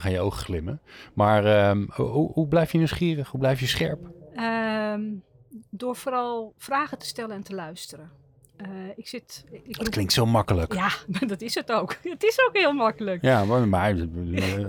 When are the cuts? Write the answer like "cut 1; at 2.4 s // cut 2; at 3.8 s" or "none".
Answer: none